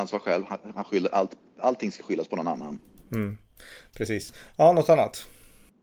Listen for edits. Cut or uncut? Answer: uncut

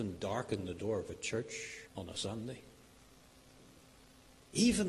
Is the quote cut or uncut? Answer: cut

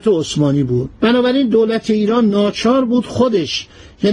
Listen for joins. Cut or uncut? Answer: cut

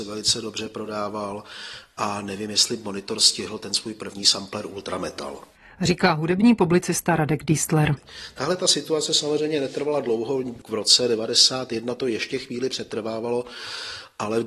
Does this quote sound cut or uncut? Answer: uncut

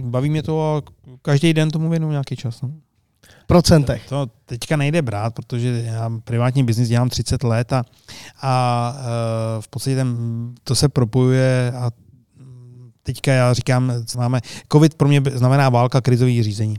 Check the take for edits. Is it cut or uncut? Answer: cut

